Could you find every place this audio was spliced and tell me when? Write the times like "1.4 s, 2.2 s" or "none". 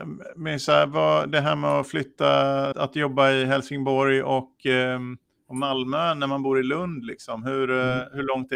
2.7 s